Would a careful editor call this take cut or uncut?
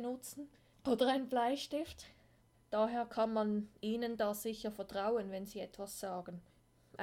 cut